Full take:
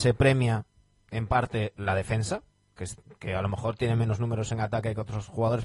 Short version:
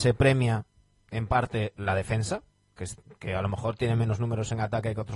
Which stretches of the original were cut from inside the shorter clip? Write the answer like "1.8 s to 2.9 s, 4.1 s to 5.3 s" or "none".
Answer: none